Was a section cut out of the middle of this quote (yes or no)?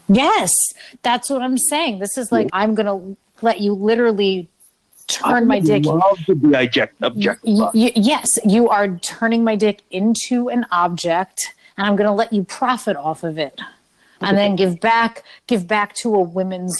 yes